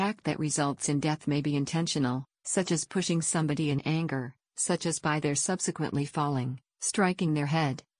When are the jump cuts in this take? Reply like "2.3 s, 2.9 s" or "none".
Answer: 4.4 s